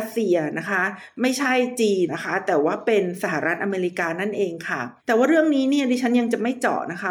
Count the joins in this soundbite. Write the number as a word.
two